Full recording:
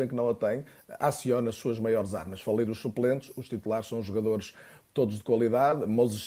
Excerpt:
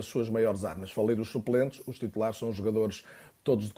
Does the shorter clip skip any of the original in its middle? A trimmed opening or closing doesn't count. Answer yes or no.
no